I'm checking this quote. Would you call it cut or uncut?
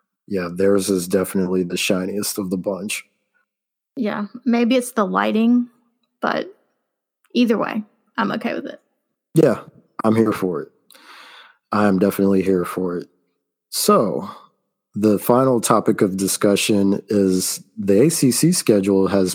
uncut